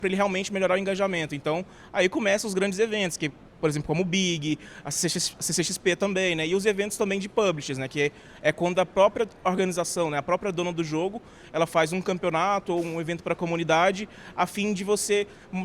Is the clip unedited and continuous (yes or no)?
yes